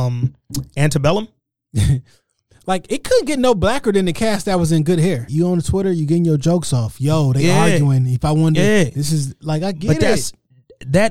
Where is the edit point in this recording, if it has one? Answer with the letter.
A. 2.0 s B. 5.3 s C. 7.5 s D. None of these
B